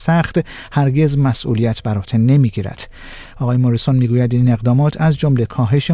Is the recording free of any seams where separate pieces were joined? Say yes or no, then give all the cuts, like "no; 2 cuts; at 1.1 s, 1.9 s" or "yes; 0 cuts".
no; 1 cut; at 3.3 s